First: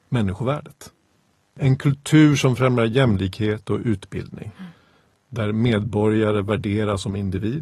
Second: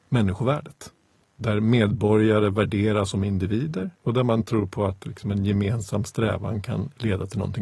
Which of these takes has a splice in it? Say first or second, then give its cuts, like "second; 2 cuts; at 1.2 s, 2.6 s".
second; 2 cuts; at 1.2 s, 4.0 s